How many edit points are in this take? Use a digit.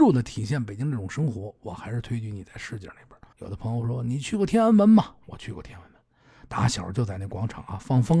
1